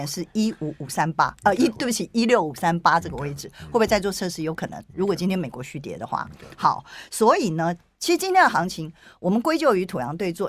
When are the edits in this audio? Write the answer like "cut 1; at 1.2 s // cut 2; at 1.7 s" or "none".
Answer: none